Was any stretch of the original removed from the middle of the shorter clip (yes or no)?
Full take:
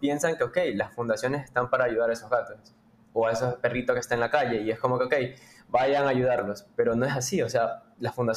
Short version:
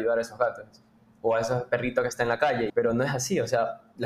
yes